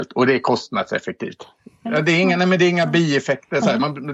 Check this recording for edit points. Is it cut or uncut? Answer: cut